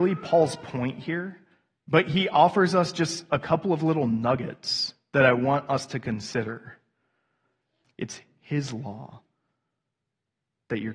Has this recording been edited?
yes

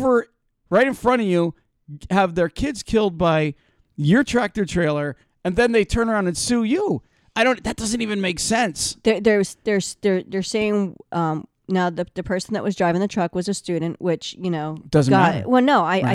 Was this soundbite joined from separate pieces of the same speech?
no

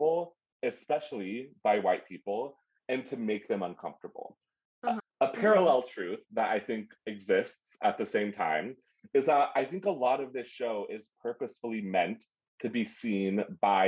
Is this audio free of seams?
no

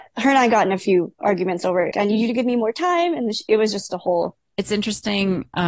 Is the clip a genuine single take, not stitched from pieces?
no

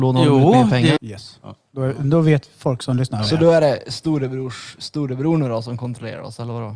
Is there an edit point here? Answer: yes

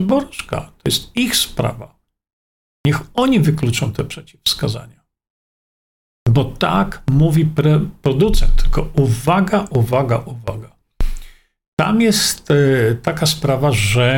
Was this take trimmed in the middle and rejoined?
no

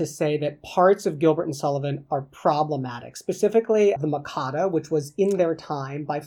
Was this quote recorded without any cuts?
no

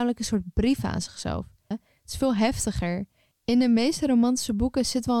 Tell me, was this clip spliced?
yes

